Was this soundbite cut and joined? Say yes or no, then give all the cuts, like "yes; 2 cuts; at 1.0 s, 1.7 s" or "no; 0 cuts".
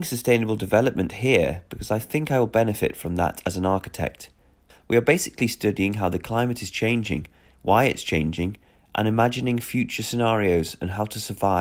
yes; 1 cut; at 4.7 s